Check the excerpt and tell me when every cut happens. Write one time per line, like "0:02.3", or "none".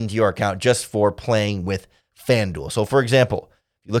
none

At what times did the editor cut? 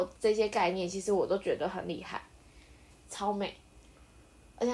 0:02.9

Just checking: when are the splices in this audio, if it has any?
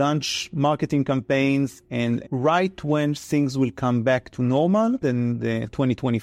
0:02.2
0:05.0

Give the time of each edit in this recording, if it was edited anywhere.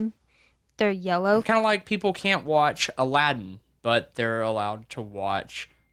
0:01.4

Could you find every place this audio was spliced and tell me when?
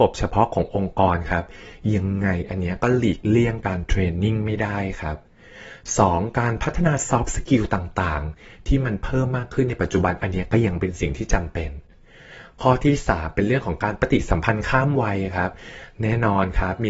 none

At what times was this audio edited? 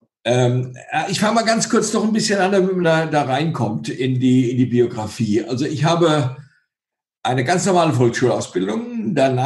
none

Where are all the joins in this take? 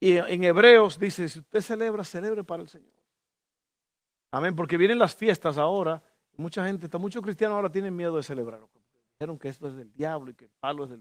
none

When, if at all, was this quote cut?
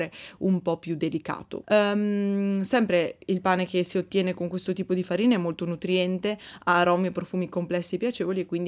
0:01.6

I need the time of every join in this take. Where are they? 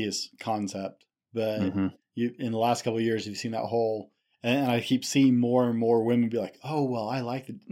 none

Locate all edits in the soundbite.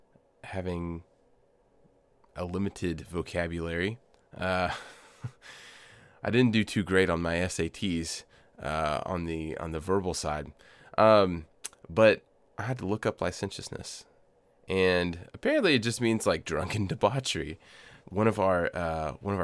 0:18.0

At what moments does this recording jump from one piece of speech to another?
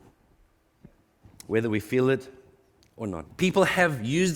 0:03.2

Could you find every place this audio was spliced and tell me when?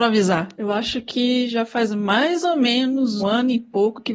0:03.2

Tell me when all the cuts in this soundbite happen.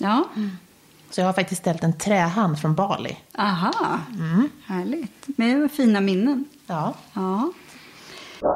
none

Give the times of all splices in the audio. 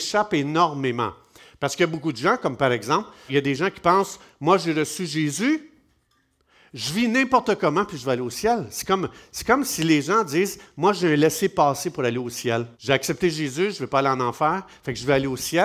0:03.3
0:12.7

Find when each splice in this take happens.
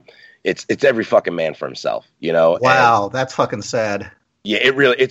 none

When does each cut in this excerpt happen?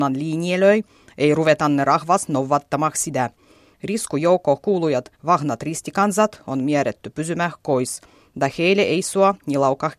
0:03.7

